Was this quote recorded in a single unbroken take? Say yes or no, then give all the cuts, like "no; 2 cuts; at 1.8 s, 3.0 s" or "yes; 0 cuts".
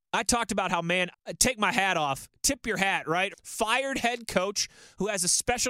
no; 2 cuts; at 1.1 s, 3.3 s